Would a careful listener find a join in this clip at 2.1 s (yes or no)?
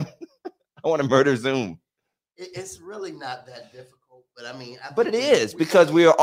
no